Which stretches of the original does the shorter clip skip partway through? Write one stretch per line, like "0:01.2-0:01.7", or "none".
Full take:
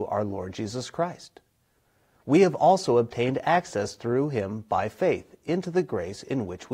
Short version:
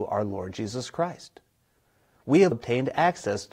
0:02.5-0:03.0